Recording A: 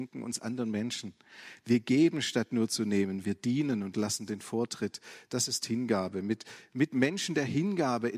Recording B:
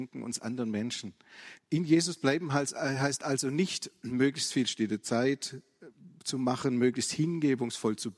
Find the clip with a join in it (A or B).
B